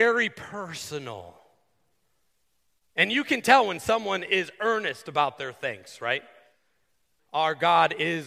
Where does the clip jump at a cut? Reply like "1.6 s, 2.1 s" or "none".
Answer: 7.2 s